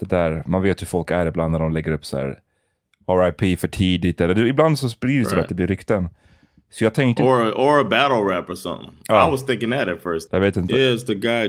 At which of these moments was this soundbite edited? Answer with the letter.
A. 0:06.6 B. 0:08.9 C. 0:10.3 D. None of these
C